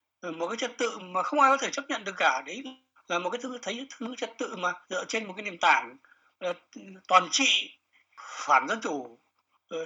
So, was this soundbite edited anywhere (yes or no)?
yes